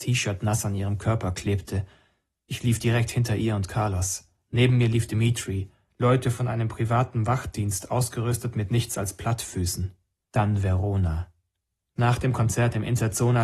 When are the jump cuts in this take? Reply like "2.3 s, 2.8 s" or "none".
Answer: 5.9 s, 10.3 s

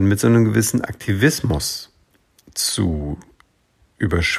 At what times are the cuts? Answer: none

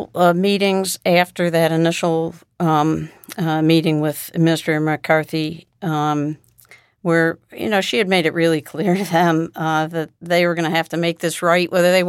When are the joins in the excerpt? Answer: none

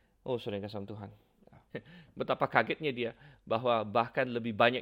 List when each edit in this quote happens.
1.7 s

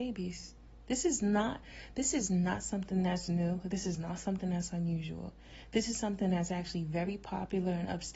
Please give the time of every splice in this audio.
none

